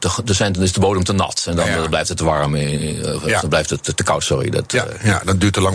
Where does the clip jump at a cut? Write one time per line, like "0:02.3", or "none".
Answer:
none